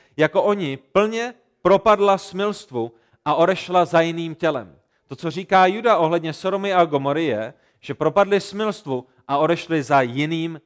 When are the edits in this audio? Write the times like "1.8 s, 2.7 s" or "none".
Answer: none